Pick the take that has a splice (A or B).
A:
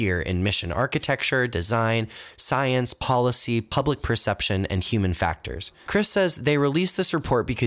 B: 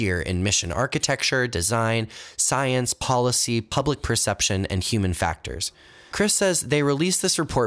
A